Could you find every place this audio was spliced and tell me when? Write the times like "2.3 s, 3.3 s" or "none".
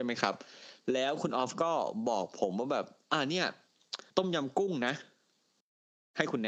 4.1 s